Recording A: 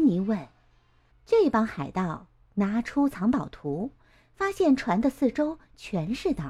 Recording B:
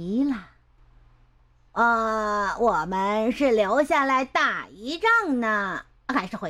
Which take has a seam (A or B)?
A